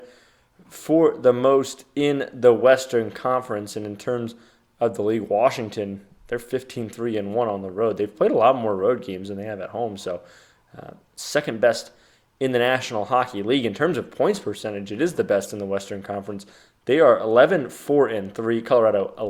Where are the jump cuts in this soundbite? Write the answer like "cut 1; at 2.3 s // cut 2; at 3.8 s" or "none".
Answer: none